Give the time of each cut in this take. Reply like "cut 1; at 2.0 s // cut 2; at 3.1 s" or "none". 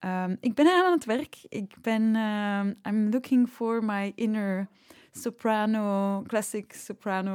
none